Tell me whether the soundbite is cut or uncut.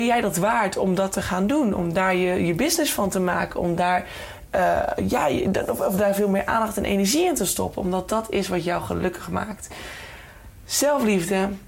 uncut